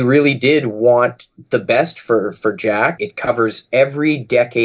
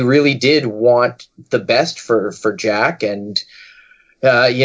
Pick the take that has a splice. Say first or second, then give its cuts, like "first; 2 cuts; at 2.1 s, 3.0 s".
first; 1 cut; at 3.0 s